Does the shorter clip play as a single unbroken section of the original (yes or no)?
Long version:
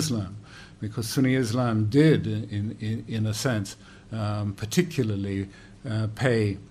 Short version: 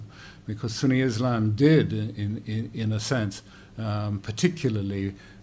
yes